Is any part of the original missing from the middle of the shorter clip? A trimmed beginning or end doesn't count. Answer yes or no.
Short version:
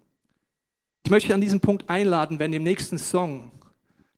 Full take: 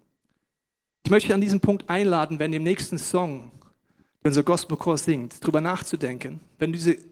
no